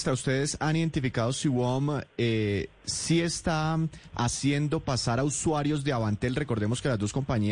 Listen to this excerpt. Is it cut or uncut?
uncut